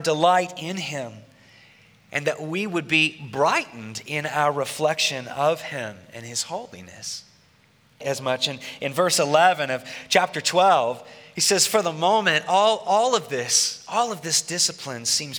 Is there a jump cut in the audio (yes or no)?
yes